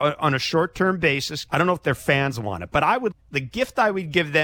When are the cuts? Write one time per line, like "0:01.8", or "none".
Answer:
0:01.5
0:03.1